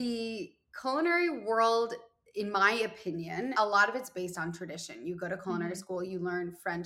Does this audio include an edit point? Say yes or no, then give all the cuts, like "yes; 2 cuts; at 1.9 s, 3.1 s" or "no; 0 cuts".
yes; 1 cut; at 3.5 s